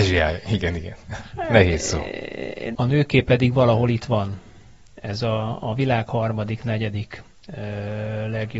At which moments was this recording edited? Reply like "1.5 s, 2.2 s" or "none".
2.8 s